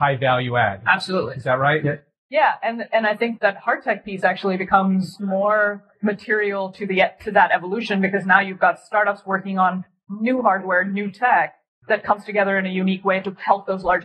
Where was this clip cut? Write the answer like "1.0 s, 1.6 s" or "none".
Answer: 1.8 s, 3.4 s, 5.2 s